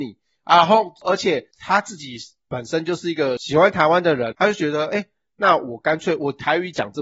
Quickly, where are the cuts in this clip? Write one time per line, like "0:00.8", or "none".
0:01.5
0:04.3